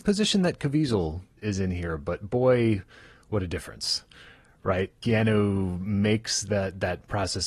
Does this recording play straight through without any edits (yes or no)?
yes